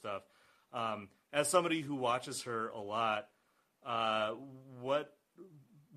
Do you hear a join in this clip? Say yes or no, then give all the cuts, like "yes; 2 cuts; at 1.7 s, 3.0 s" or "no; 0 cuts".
no; 0 cuts